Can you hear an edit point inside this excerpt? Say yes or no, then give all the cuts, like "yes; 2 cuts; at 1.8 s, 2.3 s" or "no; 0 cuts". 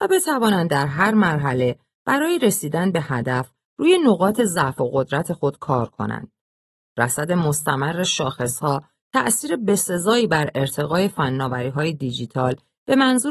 no; 0 cuts